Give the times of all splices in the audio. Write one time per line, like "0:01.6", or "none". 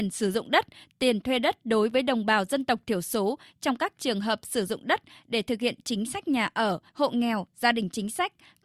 0:06.9